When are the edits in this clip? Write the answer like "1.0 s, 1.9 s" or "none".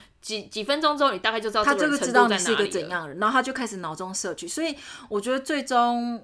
none